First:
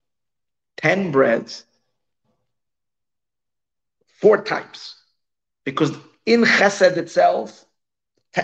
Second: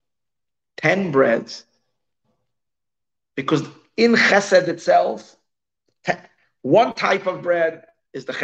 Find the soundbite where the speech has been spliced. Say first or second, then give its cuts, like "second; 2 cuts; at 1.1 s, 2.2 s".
second; 1 cut; at 3.3 s